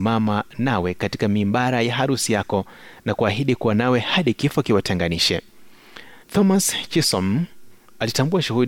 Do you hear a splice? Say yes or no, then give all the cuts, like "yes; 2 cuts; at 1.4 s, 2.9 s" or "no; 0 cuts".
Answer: yes; 1 cut; at 6.2 s